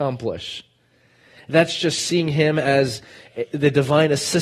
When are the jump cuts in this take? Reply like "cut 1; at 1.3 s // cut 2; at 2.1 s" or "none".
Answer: none